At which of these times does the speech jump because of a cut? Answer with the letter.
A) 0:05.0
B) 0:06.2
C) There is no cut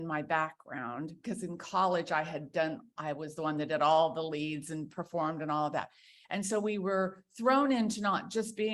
B